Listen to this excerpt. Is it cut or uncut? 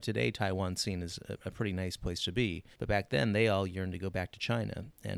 cut